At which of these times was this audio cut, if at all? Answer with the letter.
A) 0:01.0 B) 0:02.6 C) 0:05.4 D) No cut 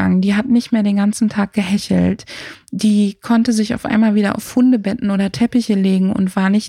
D